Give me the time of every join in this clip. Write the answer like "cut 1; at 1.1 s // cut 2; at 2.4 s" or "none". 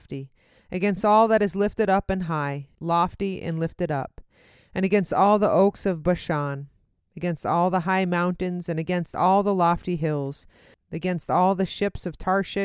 cut 1; at 2.7 s // cut 2; at 10.7 s